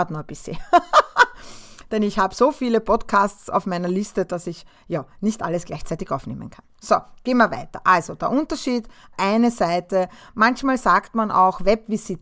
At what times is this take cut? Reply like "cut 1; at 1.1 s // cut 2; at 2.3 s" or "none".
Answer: cut 1; at 9.1 s